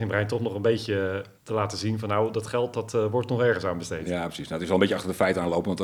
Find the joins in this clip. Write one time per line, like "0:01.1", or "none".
0:01.4